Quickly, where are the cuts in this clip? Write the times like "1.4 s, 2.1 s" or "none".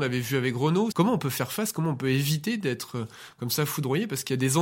0.9 s